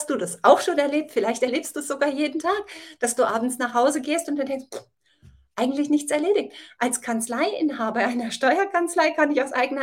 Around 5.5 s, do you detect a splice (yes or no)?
no